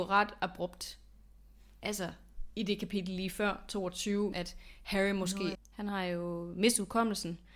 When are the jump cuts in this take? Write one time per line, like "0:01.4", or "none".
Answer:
0:04.3
0:05.5